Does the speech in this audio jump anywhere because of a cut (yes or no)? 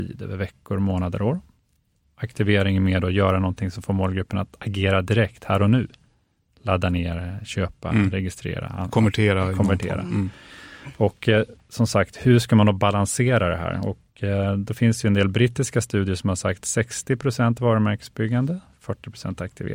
no